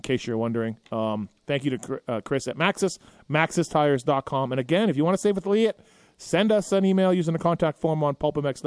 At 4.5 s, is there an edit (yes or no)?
no